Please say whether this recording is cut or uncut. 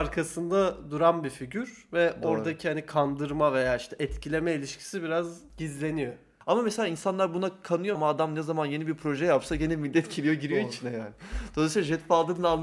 cut